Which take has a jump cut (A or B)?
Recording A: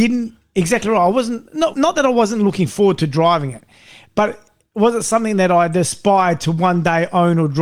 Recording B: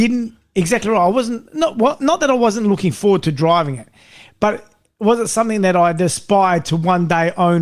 A